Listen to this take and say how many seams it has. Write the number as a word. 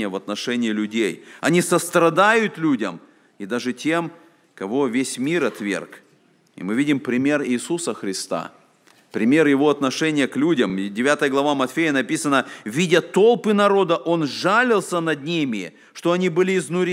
zero